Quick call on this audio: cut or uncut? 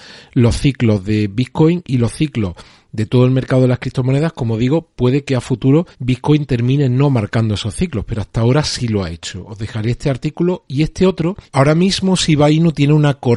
cut